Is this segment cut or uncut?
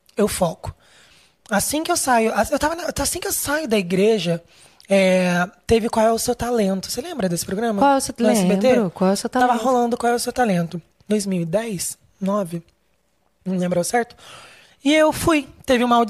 uncut